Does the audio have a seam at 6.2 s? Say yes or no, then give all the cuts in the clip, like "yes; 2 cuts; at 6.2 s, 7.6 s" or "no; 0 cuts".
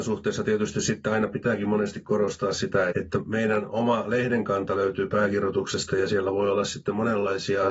no; 1 cut; at 2.9 s